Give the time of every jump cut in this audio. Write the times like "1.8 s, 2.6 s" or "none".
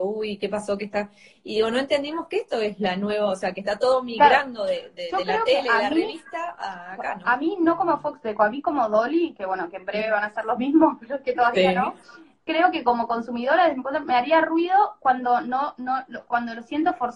none